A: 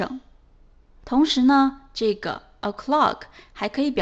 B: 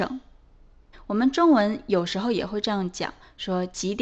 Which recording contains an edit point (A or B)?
B